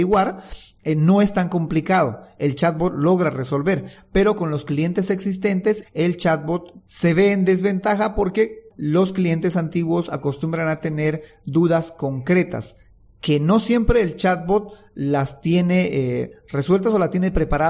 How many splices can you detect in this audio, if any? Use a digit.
2